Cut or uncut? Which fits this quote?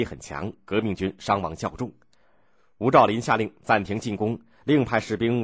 uncut